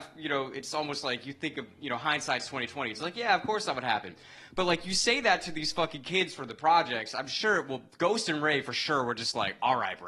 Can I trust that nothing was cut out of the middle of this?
yes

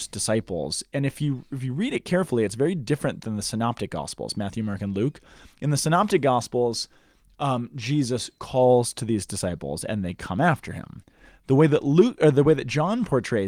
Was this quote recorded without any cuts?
yes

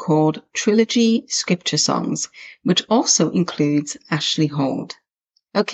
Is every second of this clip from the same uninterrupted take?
yes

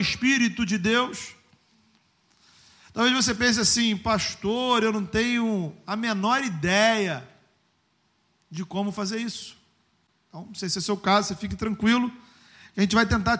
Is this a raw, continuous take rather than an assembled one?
yes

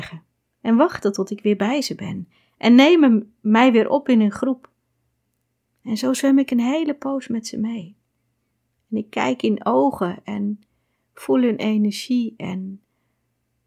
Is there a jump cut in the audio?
no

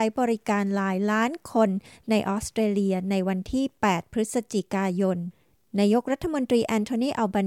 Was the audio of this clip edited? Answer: no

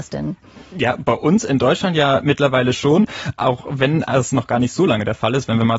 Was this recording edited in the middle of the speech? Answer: no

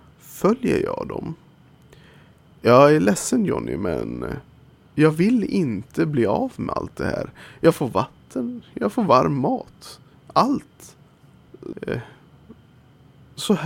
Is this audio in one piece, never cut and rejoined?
no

